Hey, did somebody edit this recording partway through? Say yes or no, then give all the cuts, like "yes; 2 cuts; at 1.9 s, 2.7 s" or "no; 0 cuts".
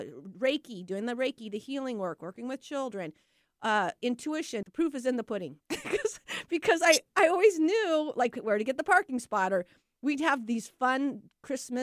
yes; 1 cut; at 4.6 s